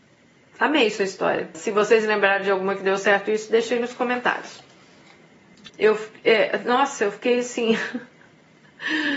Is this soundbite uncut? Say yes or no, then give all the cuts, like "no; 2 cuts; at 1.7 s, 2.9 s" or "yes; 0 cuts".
no; 2 cuts; at 1.5 s, 5.7 s